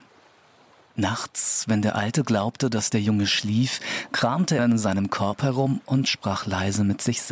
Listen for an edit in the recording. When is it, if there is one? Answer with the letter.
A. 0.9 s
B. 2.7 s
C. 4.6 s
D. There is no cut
C